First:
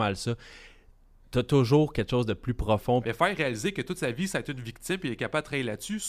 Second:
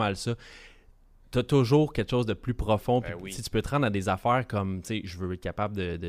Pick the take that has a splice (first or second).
first